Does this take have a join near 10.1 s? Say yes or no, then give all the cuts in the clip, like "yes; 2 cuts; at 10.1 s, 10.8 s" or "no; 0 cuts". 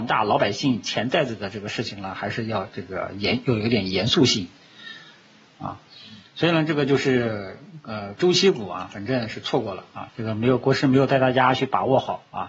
yes; 1 cut; at 10.1 s